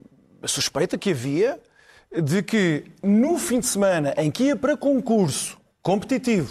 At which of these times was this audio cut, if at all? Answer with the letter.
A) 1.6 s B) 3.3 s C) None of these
C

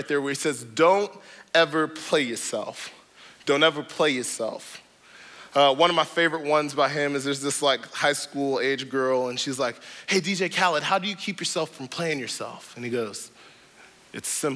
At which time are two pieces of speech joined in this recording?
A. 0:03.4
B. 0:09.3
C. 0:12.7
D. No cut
D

